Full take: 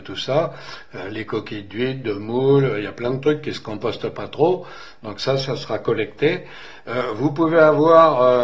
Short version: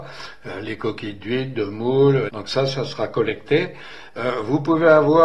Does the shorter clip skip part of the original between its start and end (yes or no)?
yes